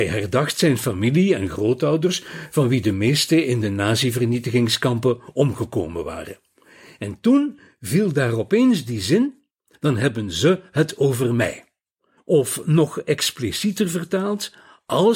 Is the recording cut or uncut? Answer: cut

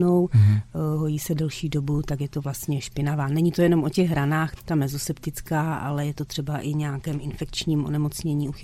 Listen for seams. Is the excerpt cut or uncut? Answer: cut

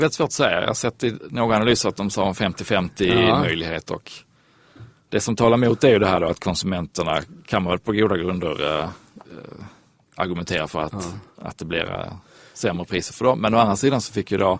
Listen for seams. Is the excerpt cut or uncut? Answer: uncut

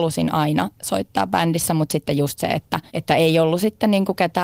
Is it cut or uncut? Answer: cut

